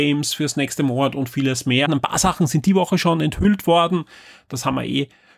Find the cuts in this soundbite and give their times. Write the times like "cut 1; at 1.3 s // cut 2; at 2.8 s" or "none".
cut 1; at 1.9 s